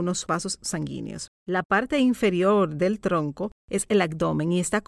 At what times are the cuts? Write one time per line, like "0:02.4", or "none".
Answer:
none